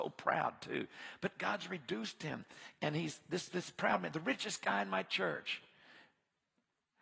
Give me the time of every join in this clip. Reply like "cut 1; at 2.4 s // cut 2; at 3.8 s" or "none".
cut 1; at 2.8 s